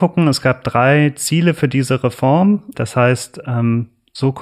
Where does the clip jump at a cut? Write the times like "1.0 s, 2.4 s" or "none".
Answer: 2.7 s